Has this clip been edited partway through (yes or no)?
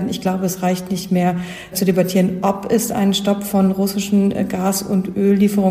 yes